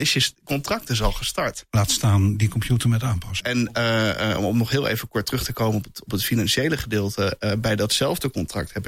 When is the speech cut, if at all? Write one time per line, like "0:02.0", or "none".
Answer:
0:03.4